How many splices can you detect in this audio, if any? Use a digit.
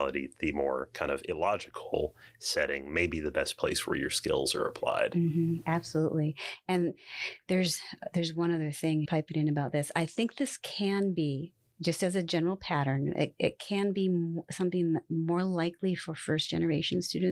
1